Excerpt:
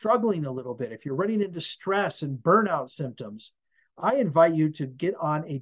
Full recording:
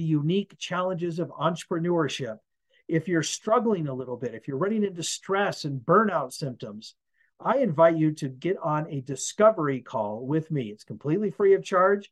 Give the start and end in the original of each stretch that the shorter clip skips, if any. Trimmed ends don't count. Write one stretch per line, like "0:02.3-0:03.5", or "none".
none